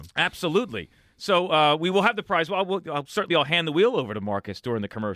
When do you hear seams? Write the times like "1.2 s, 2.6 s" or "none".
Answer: 3.3 s

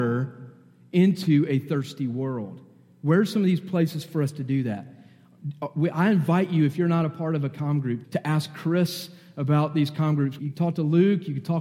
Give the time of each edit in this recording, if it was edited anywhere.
8.0 s, 10.4 s

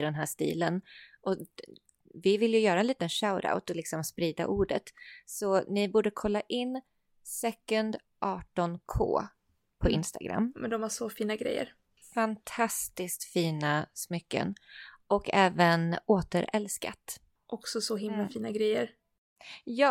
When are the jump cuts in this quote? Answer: none

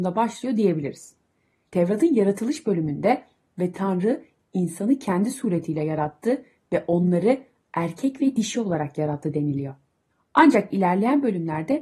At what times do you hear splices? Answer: none

